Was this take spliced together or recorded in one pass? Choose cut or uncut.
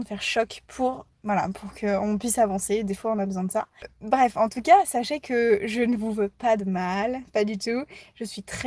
cut